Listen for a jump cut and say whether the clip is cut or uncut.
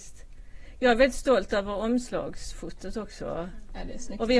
uncut